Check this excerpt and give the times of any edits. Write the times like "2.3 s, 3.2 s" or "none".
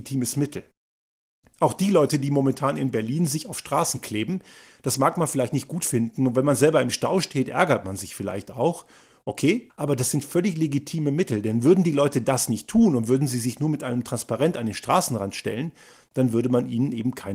9.7 s